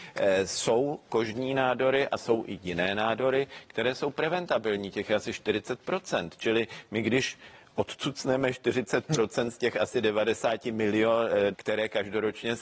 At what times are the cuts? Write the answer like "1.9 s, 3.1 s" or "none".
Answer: 11.5 s